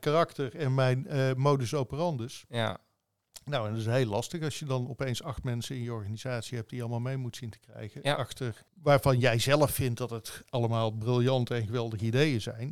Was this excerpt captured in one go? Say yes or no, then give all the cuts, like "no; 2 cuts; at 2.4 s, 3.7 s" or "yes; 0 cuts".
no; 1 cut; at 8.7 s